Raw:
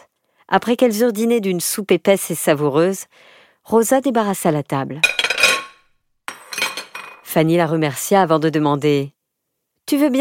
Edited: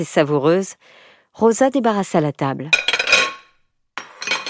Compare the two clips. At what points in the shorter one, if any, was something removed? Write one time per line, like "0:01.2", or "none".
none